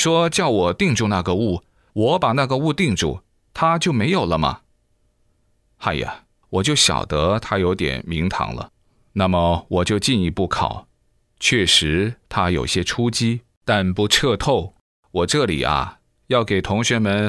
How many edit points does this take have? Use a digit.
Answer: 0